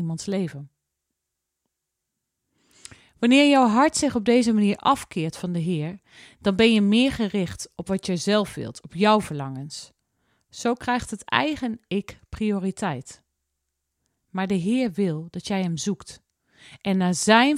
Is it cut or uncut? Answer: uncut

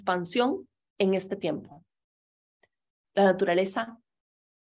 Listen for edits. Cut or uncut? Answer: uncut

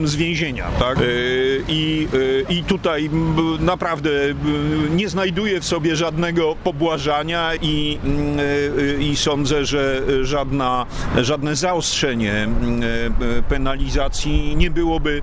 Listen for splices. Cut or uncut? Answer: cut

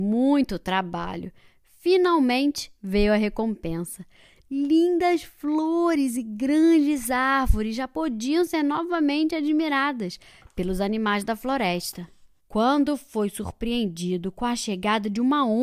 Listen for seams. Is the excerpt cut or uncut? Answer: cut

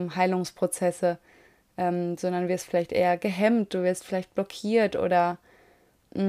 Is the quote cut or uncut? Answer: uncut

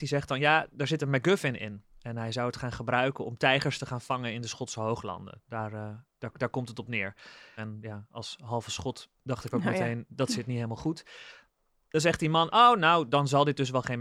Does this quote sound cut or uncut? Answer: cut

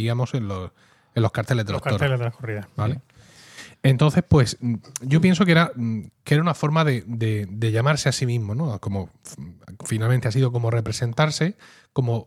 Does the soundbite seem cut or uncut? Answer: uncut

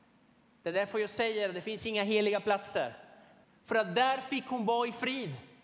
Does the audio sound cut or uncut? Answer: cut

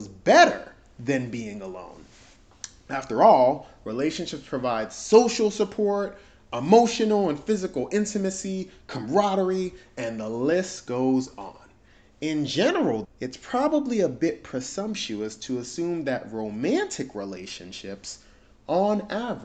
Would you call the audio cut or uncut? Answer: cut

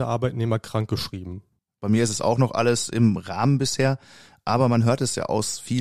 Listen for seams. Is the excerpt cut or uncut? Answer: cut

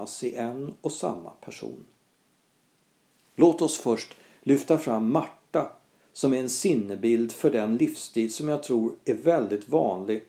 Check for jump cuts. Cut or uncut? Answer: uncut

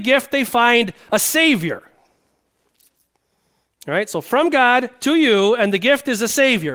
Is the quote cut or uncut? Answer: cut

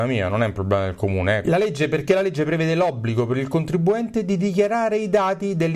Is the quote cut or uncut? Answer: cut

